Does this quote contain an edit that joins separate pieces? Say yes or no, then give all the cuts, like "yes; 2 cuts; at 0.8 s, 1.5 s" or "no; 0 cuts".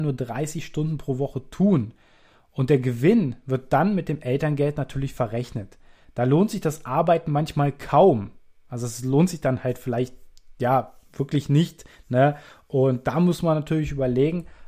no; 0 cuts